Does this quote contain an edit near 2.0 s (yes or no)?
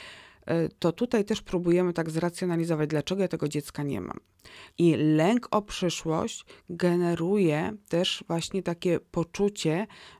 no